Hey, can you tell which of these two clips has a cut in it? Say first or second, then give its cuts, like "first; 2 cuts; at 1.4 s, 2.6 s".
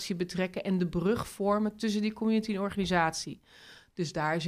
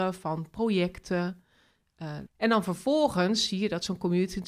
second; 1 cut; at 2.3 s